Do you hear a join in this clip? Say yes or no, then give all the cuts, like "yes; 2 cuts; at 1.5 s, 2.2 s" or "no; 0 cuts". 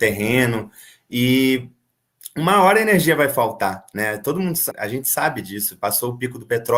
yes; 1 cut; at 4.7 s